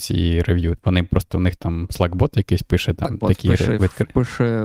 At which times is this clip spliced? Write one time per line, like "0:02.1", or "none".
none